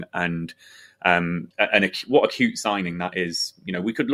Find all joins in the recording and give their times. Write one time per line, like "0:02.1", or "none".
0:01.5